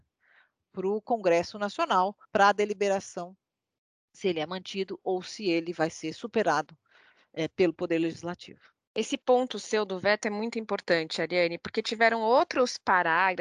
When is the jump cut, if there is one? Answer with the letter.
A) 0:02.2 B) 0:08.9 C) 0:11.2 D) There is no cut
A